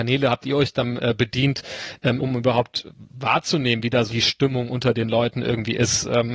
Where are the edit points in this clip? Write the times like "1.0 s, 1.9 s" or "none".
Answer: 2.2 s, 4.1 s